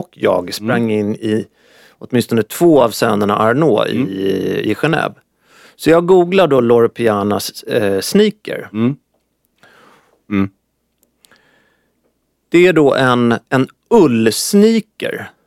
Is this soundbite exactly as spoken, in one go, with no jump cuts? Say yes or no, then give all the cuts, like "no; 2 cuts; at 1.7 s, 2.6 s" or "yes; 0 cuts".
no; 2 cuts; at 10.3 s, 13.5 s